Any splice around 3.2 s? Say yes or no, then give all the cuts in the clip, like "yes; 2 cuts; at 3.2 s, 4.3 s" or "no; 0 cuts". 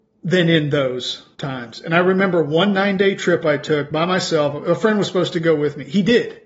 no; 0 cuts